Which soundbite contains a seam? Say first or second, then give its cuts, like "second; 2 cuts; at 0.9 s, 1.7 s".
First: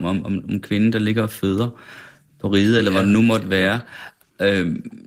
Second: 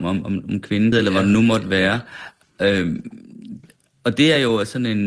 second; 1 cut; at 0.9 s